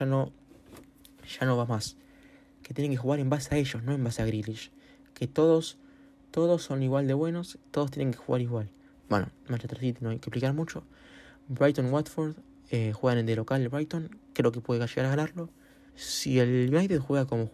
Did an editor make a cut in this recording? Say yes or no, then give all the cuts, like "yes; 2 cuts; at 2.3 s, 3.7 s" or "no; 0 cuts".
yes; 2 cuts; at 8.9 s, 15.9 s